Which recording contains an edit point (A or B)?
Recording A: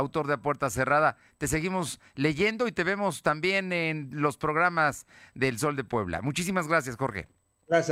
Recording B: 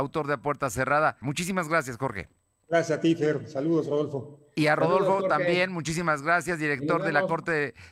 B